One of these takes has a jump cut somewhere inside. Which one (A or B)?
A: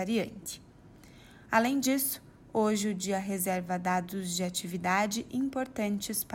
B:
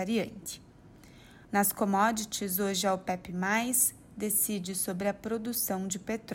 B